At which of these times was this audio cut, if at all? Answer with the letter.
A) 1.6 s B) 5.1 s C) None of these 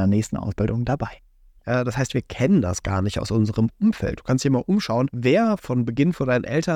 A